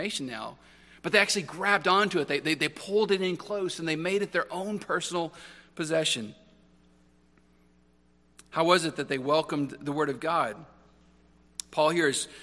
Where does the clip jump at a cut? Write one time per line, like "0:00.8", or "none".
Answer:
none